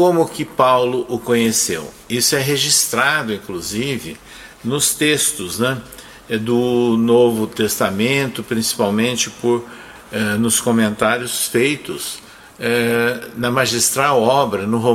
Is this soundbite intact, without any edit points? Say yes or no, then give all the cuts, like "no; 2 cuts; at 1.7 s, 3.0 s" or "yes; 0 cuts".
yes; 0 cuts